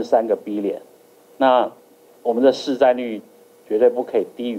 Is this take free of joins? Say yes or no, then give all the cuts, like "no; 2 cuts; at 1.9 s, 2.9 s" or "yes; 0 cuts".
yes; 0 cuts